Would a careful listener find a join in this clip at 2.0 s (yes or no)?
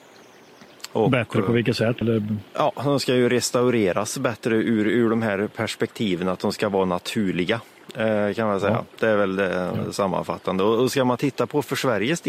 yes